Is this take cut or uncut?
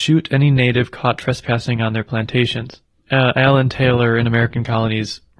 cut